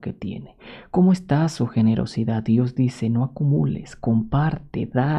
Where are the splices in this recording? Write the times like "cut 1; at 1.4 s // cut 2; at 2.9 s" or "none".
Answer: none